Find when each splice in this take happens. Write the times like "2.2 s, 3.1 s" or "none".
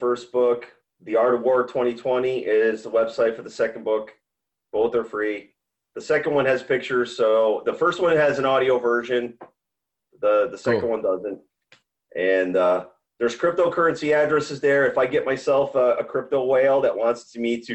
none

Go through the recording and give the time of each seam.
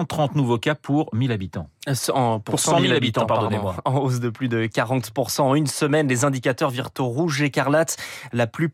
none

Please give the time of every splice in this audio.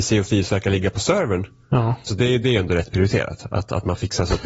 2.1 s

